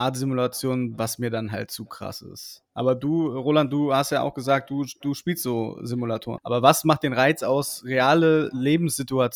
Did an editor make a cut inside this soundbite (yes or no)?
yes